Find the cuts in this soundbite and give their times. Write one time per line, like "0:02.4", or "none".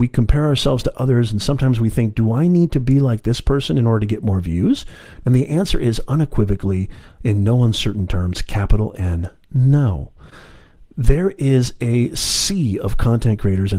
0:05.2